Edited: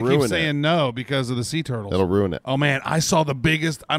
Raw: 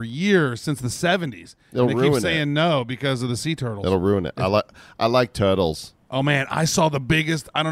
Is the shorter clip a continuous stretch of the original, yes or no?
no